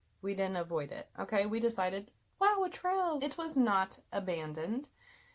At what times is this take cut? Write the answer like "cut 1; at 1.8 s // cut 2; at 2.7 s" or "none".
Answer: cut 1; at 3.2 s